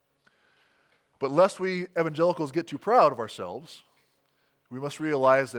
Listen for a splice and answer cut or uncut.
uncut